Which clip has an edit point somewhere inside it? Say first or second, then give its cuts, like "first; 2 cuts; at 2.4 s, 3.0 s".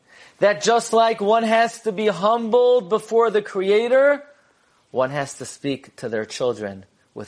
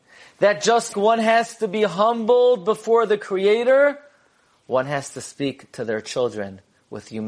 second; 1 cut; at 0.9 s